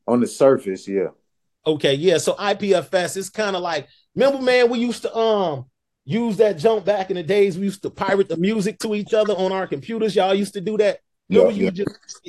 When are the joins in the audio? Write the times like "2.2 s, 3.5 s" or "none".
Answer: none